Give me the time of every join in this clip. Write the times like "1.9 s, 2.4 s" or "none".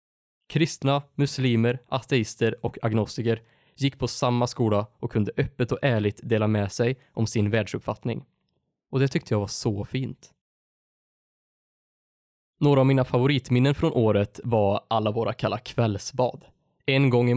none